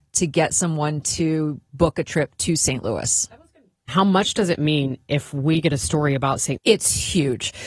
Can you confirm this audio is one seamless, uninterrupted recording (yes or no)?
no